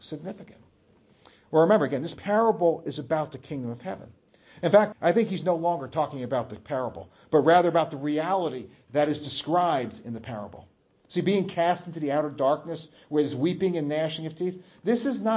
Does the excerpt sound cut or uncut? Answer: cut